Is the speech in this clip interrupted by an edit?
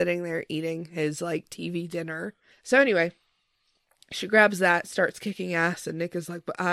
yes; 1 cut; at 2.5 s

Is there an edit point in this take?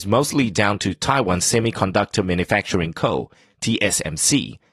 no; 0 cuts

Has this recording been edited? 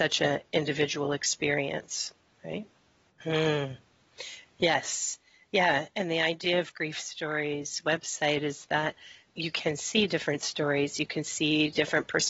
yes; 2 cuts; at 3.2 s, 9.3 s

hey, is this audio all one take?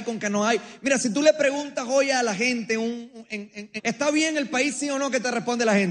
no; 1 cut; at 3.8 s

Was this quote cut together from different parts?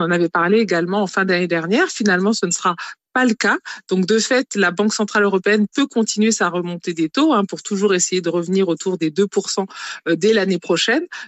no; 0 cuts

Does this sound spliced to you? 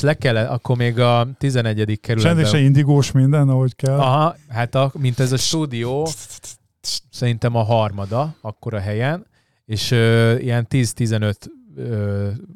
yes; 1 cut; at 4.3 s

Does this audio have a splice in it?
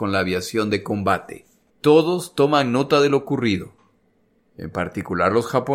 yes; 1 cut; at 1.7 s

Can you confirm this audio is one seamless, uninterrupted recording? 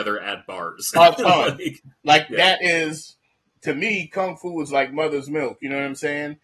yes; 0 cuts

